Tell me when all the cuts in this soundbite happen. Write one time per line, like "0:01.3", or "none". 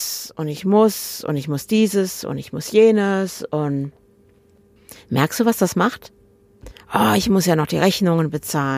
none